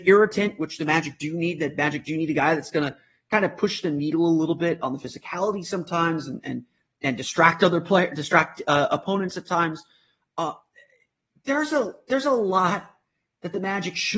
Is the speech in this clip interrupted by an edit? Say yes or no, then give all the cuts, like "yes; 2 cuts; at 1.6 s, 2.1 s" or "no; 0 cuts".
no; 0 cuts